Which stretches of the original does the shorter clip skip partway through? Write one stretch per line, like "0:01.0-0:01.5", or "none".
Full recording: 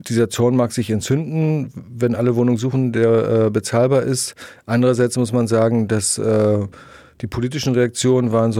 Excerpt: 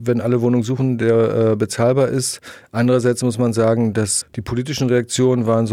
0:06.2-0:07.1